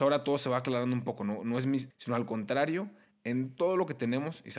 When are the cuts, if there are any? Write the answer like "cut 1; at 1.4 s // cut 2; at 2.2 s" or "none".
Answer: cut 1; at 1.9 s // cut 2; at 3.1 s